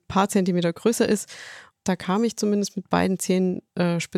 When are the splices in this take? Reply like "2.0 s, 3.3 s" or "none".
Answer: 1.7 s